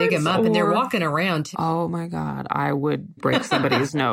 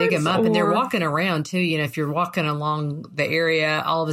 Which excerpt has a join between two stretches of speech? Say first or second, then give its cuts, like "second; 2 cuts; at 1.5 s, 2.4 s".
first; 2 cuts; at 1.5 s, 3.2 s